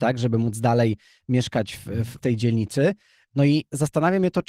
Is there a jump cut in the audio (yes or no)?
no